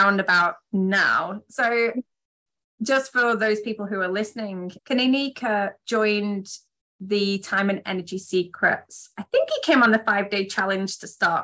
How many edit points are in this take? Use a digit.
1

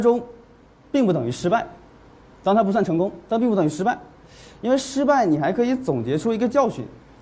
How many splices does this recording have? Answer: 0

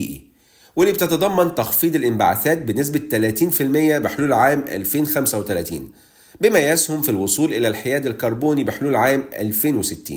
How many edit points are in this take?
0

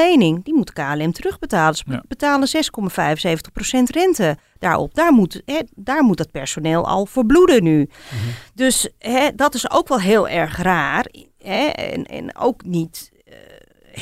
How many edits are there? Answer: 0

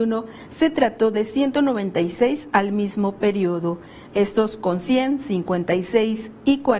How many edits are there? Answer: 1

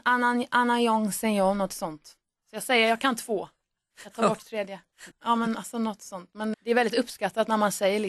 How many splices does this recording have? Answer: 2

